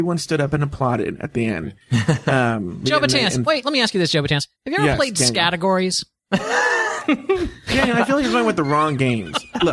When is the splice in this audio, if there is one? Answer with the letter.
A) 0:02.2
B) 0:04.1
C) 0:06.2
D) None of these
D